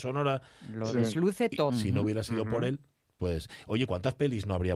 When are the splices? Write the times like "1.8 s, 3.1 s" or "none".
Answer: 1.7 s